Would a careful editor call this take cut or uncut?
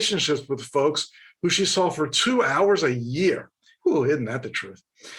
cut